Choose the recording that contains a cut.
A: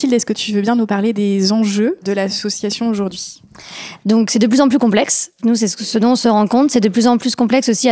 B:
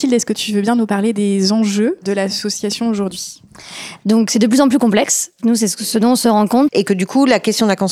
B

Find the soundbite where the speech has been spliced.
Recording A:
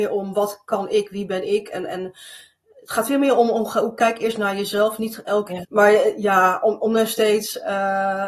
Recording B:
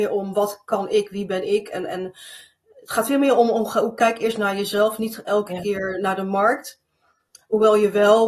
A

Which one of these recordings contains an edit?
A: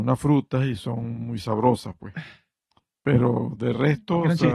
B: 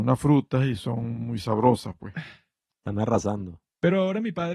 B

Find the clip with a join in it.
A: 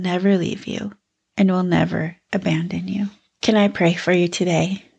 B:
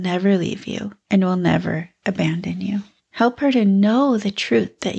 B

